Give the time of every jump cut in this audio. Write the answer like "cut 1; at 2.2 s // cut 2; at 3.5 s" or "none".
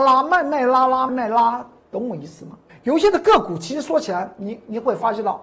cut 1; at 1.1 s // cut 2; at 2.7 s